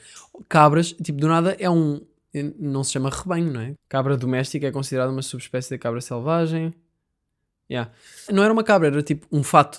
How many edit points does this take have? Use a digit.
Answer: 2